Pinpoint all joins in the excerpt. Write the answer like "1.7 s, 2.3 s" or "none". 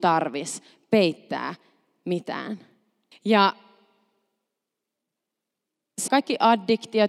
3.1 s, 6.1 s